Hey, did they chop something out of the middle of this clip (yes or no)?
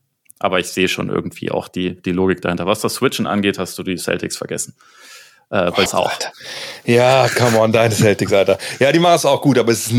yes